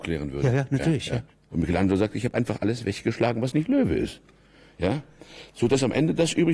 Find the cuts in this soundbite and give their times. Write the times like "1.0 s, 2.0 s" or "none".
1.5 s